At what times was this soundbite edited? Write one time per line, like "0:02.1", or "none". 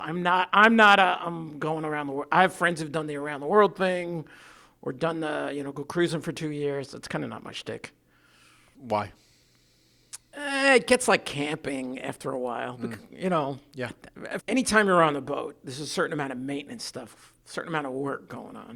0:14.4